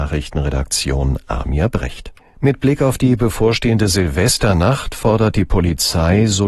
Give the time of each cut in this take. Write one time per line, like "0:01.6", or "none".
0:02.2